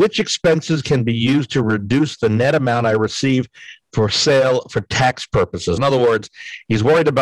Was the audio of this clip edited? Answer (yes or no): yes